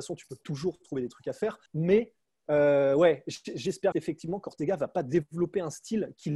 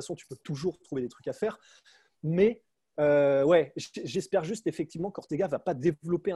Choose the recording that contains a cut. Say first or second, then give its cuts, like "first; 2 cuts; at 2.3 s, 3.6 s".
first; 2 cuts; at 1.7 s, 3.9 s